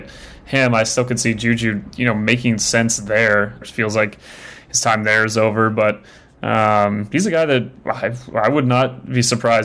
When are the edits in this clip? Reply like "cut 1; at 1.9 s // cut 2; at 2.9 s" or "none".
cut 1; at 3.6 s